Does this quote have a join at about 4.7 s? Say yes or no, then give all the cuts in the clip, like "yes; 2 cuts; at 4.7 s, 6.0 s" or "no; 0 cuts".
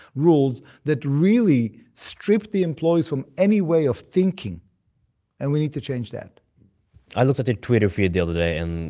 no; 0 cuts